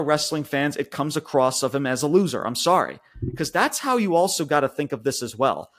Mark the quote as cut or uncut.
uncut